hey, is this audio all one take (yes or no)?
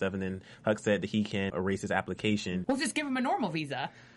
no